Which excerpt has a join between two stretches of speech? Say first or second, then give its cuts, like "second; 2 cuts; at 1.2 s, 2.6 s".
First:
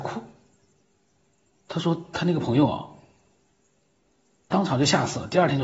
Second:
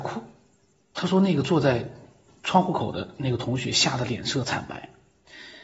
second; 1 cut; at 0.9 s